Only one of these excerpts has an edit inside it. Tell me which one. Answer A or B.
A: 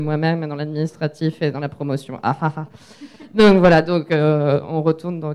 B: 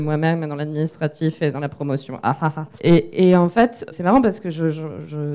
B